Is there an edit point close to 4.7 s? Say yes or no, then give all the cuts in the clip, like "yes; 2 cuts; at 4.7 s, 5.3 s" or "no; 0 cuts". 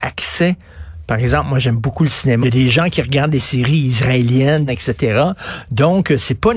yes; 2 cuts; at 2.4 s, 4.7 s